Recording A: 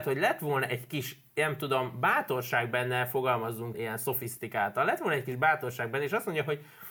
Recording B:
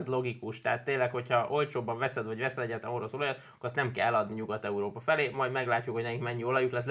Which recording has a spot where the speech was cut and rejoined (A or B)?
A